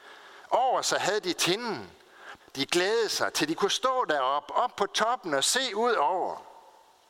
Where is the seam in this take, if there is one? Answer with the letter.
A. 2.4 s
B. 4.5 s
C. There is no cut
A